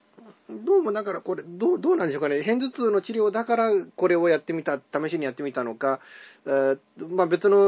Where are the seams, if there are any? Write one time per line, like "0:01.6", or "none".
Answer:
none